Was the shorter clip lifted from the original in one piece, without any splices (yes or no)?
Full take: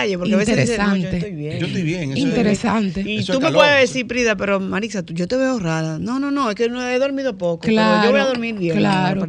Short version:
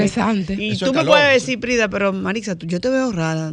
yes